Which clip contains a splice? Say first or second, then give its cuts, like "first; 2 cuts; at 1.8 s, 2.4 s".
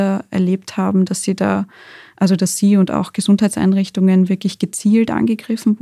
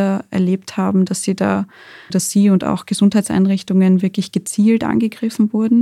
second; 1 cut; at 2.1 s